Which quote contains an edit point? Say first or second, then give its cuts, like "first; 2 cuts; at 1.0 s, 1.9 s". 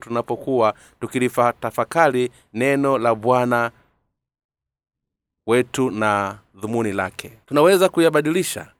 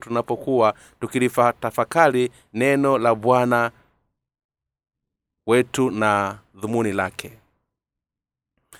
first; 1 cut; at 7.4 s